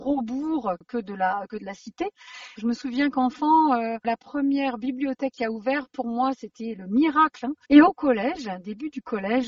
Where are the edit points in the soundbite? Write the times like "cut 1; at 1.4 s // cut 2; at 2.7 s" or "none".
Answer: cut 1; at 2.6 s // cut 2; at 7.6 s